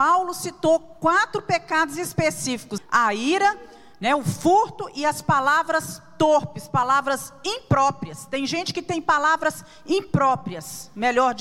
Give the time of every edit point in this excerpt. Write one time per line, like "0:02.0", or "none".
0:02.8